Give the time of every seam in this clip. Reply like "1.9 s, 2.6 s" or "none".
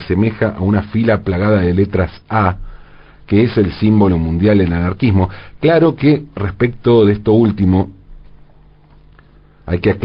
none